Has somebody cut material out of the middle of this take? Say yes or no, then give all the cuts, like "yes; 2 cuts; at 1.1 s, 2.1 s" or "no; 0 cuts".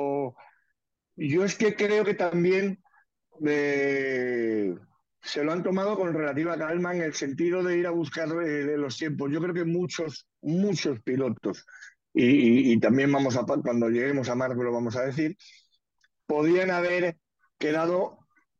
yes; 1 cut; at 10.4 s